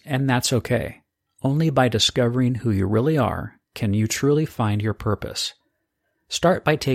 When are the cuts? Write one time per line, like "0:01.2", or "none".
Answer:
0:03.6